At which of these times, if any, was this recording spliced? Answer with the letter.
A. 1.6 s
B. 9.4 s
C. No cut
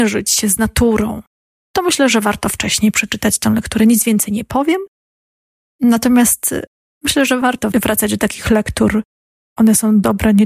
A